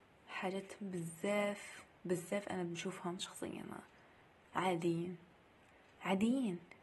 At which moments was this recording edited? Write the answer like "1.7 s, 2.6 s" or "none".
3.2 s